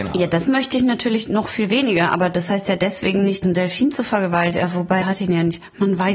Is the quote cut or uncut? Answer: cut